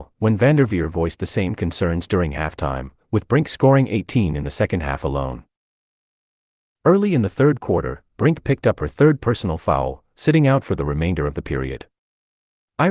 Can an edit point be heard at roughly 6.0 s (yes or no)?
no